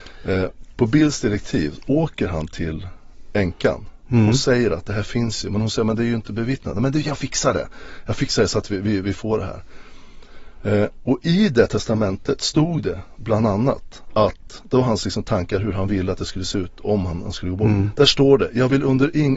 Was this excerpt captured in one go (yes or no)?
yes